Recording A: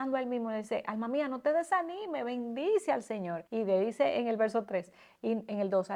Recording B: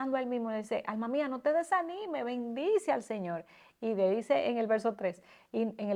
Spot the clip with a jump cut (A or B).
A